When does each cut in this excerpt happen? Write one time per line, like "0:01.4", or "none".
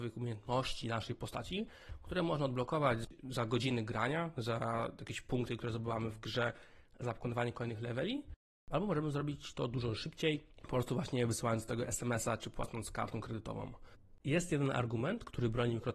0:14.2